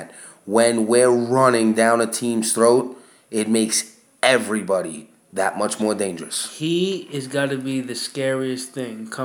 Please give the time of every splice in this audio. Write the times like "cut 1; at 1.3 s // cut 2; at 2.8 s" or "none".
none